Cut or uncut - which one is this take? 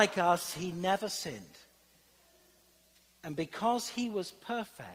uncut